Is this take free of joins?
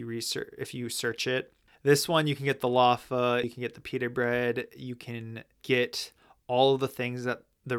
no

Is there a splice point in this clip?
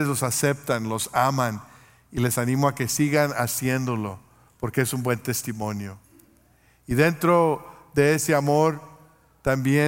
no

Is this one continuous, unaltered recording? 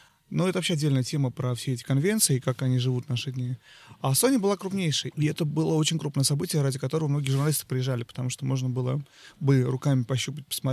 no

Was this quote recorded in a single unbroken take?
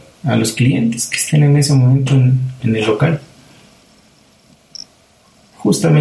no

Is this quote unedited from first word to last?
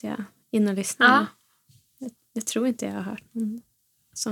yes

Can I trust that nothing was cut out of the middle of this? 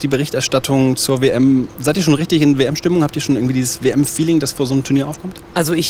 yes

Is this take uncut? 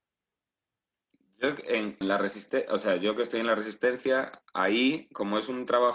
no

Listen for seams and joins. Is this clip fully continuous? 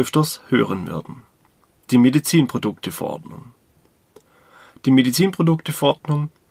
yes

